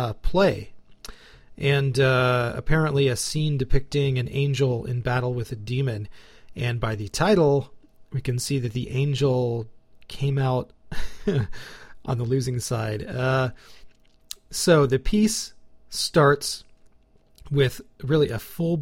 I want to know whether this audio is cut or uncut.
uncut